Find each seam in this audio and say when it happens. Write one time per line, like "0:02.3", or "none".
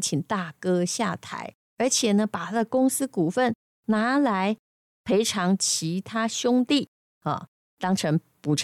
none